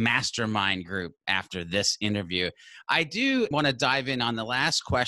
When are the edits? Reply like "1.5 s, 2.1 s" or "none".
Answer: 3.5 s

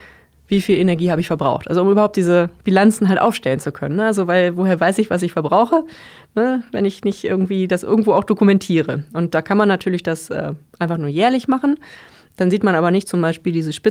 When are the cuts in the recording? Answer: none

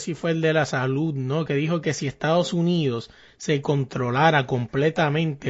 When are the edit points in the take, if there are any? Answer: none

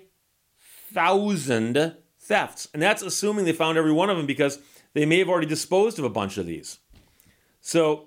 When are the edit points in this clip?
none

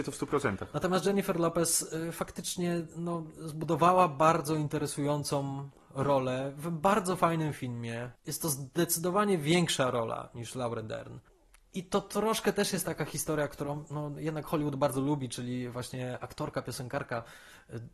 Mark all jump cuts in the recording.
none

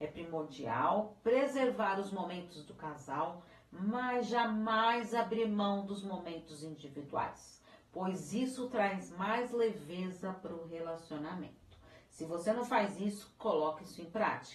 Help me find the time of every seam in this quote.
none

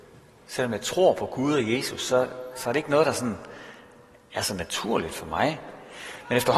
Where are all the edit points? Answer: none

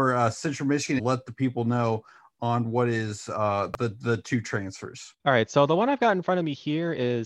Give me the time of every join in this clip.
1.0 s, 5.2 s

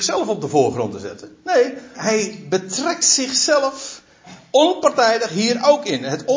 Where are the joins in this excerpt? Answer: 1.9 s

